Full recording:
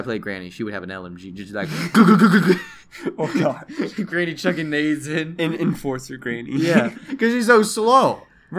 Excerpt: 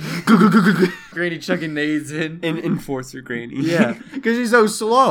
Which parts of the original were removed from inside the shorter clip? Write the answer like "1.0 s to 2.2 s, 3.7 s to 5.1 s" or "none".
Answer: 2.8 s to 4.1 s